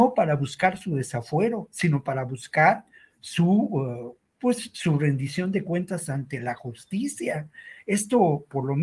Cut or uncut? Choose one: cut